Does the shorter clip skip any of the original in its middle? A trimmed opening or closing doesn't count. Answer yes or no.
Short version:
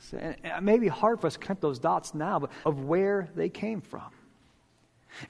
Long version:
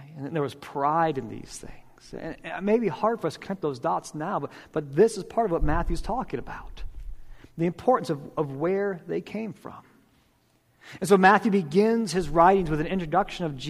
yes